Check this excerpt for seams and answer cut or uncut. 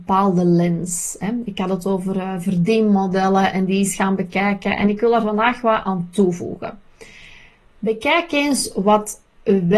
uncut